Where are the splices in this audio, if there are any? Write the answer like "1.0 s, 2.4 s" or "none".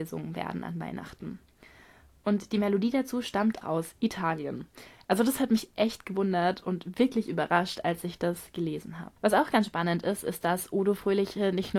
3.6 s, 9.2 s